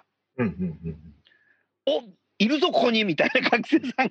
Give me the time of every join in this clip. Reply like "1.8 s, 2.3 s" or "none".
none